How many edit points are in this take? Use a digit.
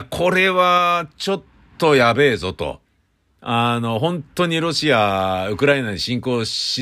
0